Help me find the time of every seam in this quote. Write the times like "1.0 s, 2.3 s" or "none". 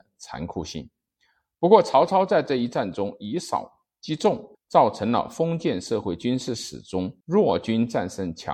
4.5 s, 7.2 s